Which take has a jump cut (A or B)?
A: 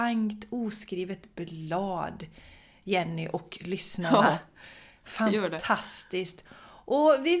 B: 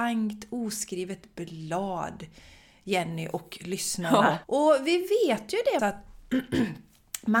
B